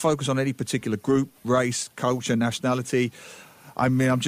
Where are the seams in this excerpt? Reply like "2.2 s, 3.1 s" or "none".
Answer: none